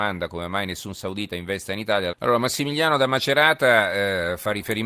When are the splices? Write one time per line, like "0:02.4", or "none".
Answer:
0:02.1